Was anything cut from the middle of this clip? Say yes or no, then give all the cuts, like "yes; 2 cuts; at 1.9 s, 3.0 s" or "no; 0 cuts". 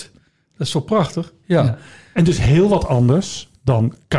no; 0 cuts